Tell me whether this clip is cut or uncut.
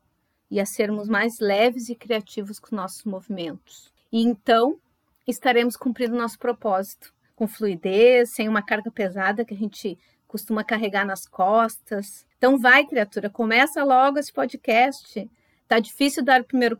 uncut